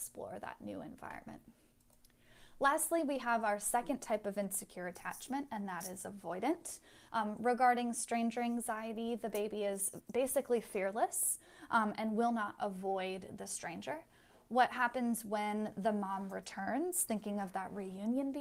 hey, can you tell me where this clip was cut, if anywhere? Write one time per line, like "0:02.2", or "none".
0:07.1